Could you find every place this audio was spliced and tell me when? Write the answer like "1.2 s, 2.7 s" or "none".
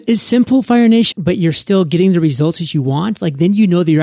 1.1 s